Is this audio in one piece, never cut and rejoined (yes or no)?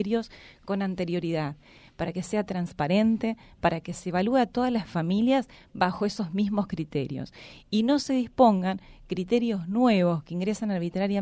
no